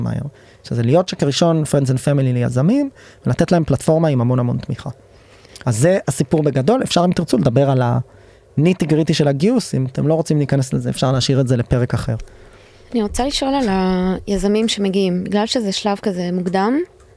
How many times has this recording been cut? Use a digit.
0